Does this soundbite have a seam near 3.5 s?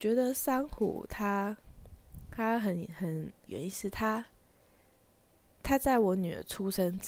yes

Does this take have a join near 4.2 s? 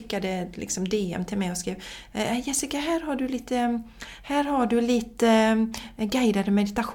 no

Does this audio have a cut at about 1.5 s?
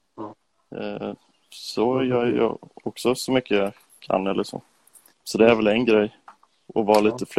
no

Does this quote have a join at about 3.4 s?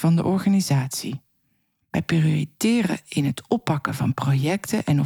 no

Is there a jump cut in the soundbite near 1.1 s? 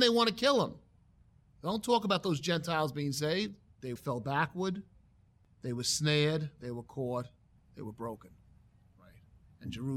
no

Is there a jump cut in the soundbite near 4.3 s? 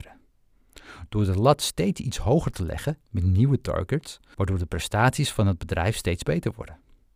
yes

